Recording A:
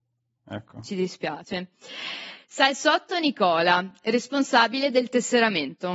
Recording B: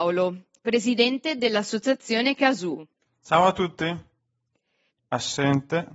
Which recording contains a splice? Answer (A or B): B